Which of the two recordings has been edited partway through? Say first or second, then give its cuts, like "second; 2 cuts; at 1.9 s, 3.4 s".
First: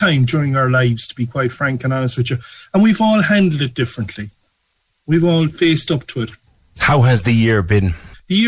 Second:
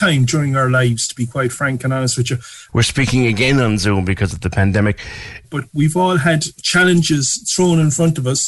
second; 2 cuts; at 2.7 s, 5.4 s